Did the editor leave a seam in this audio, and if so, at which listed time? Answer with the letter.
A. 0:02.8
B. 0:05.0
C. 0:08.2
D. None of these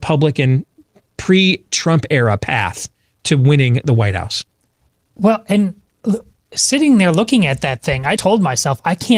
C